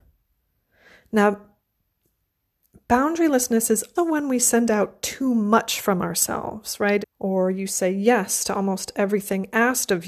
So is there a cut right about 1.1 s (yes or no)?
no